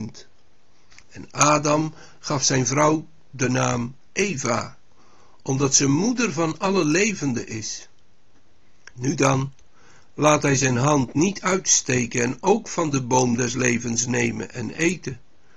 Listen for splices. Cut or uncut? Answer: cut